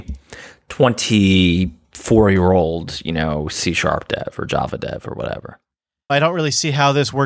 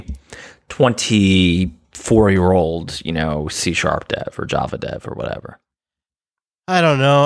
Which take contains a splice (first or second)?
first